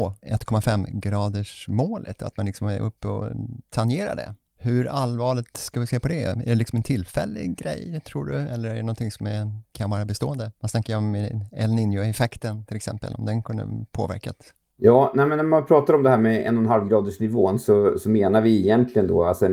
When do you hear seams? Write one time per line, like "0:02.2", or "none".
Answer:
none

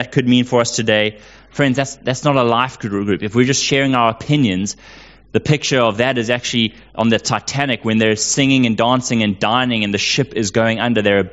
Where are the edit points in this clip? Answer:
none

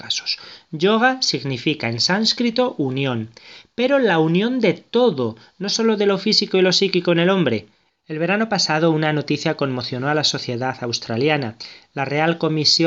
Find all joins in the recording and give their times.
0:07.9

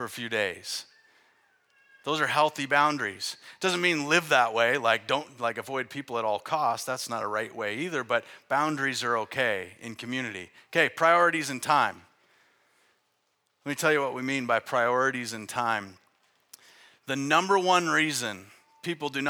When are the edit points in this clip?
none

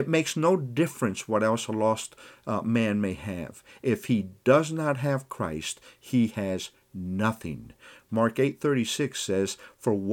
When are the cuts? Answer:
none

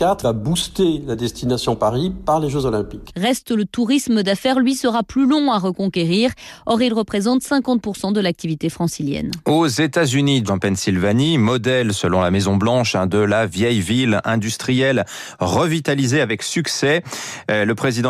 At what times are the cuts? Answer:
0:10.5

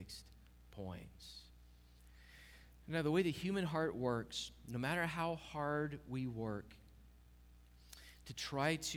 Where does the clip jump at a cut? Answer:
none

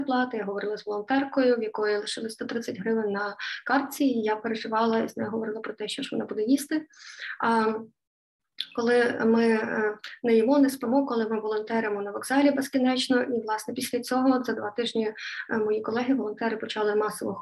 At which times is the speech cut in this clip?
none

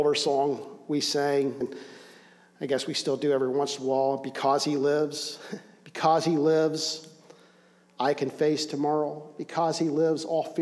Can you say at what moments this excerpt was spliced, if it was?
0:01.6

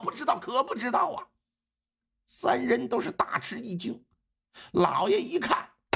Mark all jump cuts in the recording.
none

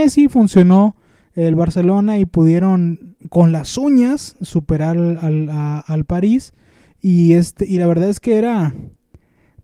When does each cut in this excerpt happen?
none

